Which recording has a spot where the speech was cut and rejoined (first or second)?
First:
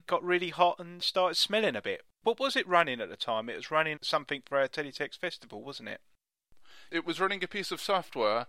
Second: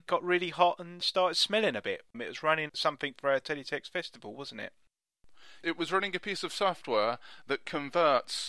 second